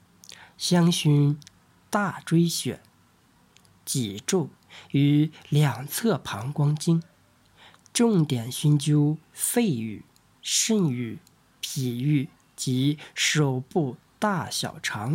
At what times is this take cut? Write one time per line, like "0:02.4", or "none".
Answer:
none